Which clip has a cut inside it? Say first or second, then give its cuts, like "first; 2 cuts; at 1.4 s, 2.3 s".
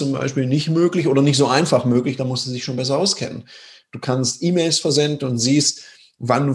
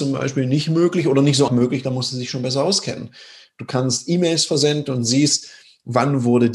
second; 1 cut; at 1.5 s